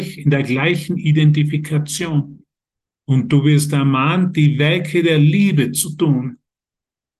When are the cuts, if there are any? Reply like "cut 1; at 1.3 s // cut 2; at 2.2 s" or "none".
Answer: cut 1; at 2.9 s